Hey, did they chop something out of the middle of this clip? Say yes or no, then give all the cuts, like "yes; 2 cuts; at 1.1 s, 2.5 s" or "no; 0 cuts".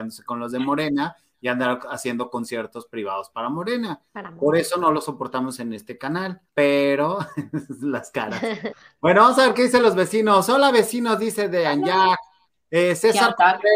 yes; 2 cuts; at 6.5 s, 8.7 s